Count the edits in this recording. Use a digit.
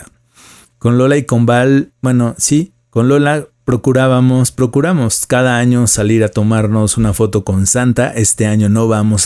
0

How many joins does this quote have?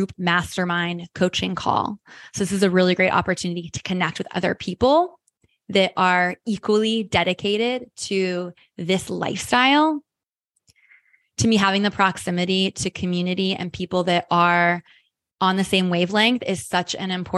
0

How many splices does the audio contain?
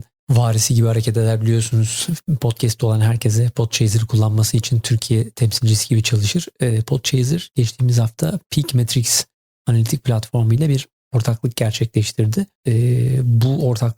1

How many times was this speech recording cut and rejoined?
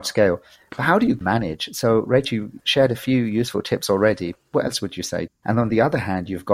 1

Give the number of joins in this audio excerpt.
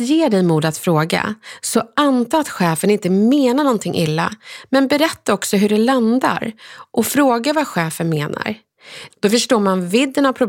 1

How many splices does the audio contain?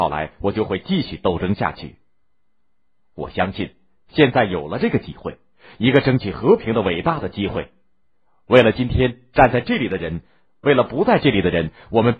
0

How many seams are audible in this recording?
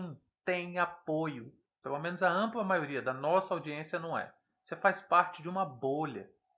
1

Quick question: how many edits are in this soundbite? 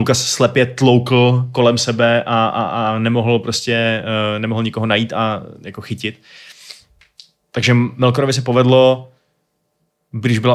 0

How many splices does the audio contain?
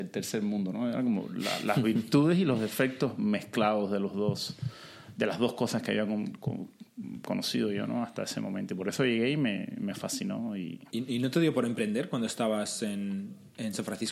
1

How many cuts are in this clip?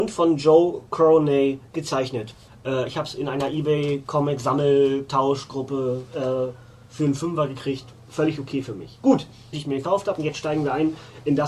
2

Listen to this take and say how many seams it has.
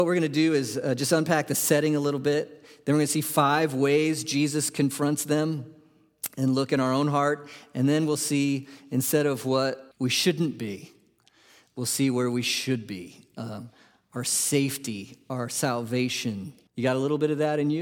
2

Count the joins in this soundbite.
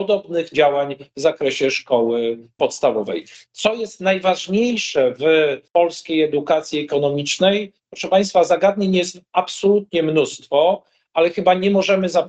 1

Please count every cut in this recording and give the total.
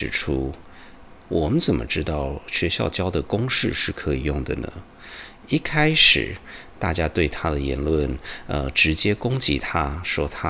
1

